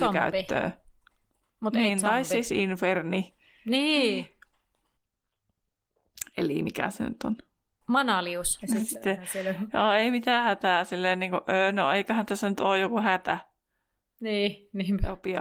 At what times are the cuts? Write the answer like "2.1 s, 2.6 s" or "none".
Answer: 8.6 s